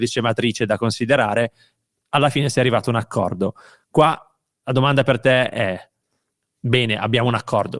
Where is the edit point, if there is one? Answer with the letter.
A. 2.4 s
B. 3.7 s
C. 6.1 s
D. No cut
D